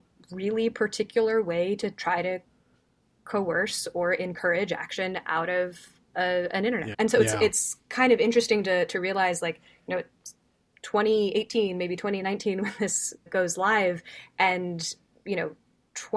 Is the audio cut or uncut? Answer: cut